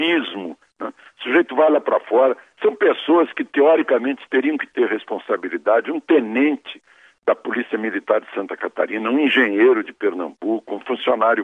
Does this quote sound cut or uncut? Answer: uncut